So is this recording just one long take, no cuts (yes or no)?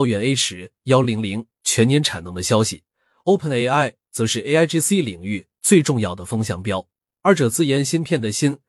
yes